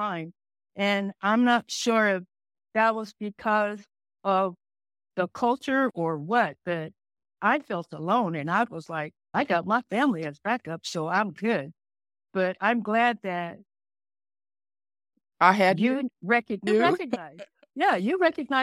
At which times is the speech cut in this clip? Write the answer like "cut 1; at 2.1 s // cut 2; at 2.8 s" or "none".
cut 1; at 16.7 s

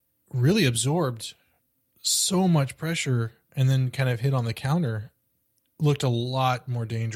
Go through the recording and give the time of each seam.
none

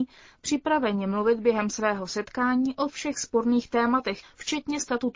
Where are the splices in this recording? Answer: cut 1; at 4.2 s

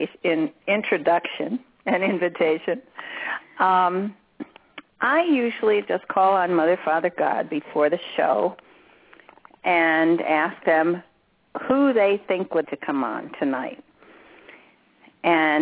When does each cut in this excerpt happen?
cut 1; at 4.9 s // cut 2; at 12.6 s

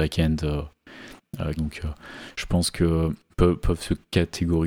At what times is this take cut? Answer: cut 1; at 1.6 s // cut 2; at 3.3 s

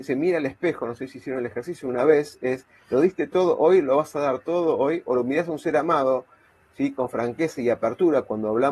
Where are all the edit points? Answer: none

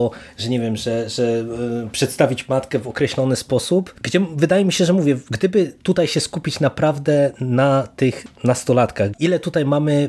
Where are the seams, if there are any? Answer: cut 1; at 4.0 s // cut 2; at 9.1 s

